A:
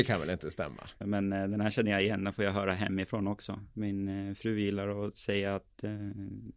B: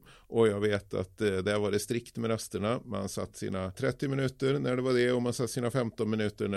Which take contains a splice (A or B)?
A